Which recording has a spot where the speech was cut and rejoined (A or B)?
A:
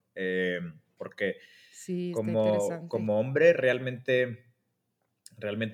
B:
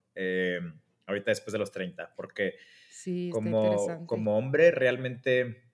A